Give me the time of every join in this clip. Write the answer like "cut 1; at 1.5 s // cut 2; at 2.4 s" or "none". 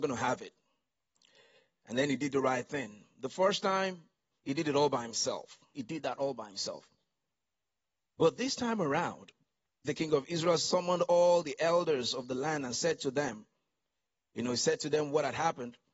cut 1; at 5.7 s // cut 2; at 9.8 s